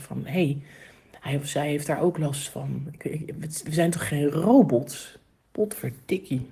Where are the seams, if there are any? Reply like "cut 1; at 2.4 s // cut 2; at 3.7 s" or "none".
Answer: none